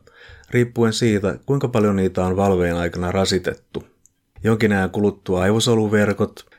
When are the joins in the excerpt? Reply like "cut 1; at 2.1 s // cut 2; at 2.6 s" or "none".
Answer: cut 1; at 4.3 s